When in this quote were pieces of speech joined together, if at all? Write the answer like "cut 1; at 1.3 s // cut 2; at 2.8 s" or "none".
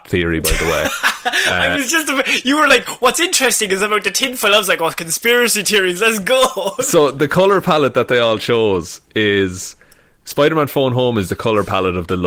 none